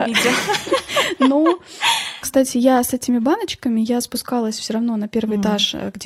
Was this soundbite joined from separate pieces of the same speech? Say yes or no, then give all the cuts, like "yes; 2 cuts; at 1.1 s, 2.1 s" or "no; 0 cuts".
no; 0 cuts